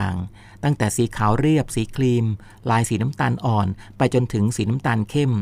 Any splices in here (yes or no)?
no